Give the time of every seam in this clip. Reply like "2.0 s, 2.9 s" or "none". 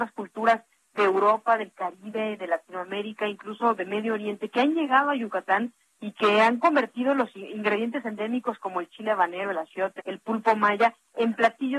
10.0 s